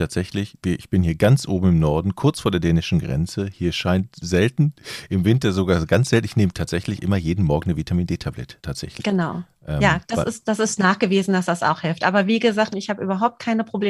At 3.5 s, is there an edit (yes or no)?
no